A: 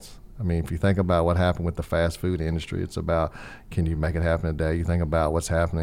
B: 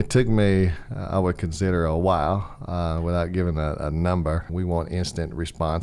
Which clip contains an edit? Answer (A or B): B